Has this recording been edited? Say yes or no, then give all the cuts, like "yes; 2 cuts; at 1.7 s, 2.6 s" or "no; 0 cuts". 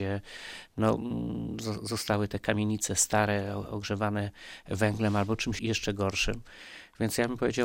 yes; 1 cut; at 5.6 s